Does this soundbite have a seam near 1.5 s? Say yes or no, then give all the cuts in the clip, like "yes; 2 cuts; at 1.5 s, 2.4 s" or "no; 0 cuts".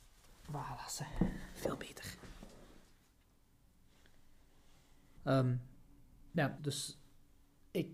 no; 2 cuts; at 5.2 s, 6.6 s